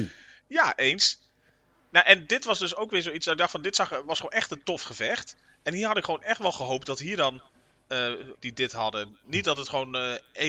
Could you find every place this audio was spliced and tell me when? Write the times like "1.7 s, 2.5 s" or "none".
8.3 s